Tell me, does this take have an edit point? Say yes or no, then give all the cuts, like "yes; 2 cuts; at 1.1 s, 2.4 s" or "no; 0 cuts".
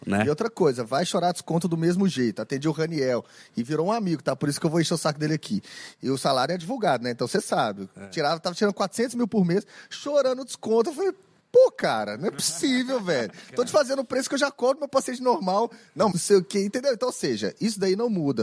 yes; 1 cut; at 16.1 s